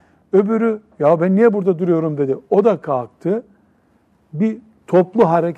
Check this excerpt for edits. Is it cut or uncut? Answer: uncut